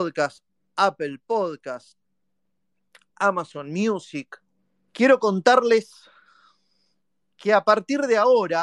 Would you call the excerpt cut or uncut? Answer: cut